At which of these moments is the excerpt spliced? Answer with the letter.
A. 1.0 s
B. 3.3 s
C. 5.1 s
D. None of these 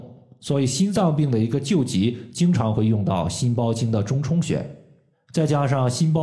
C